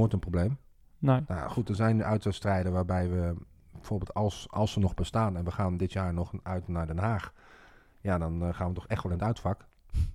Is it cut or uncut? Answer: uncut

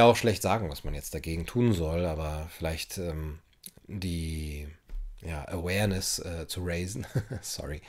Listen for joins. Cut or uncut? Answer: uncut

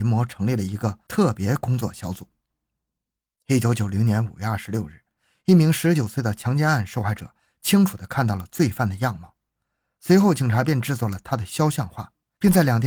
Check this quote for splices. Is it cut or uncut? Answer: uncut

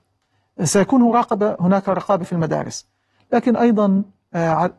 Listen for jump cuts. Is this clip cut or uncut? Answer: uncut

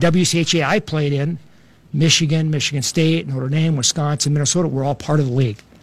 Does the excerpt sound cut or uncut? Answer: uncut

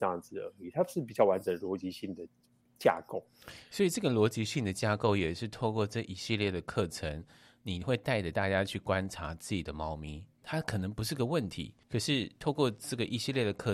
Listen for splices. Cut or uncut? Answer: cut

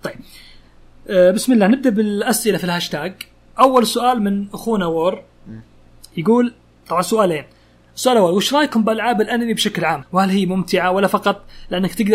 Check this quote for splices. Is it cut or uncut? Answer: cut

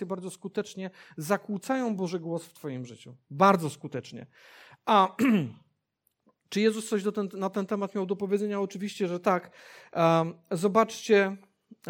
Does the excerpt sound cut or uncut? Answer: uncut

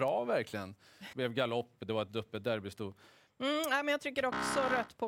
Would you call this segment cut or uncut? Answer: cut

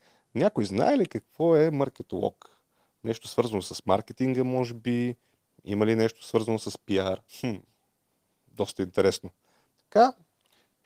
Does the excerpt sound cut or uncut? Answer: cut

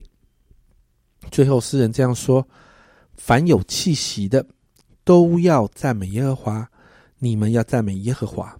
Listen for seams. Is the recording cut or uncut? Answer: uncut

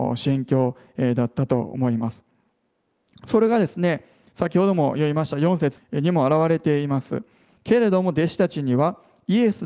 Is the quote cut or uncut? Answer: cut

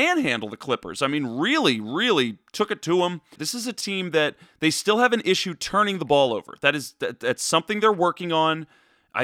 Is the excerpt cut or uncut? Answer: cut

